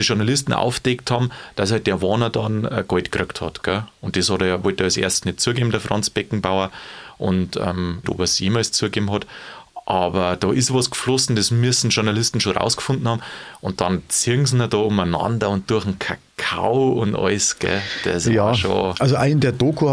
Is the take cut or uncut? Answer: cut